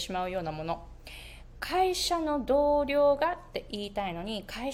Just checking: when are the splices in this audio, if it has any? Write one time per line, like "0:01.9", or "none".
none